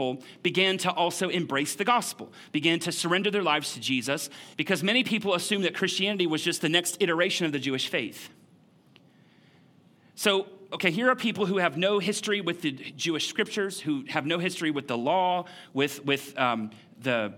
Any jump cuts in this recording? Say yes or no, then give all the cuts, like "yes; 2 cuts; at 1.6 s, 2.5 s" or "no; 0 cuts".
yes; 1 cut; at 4.5 s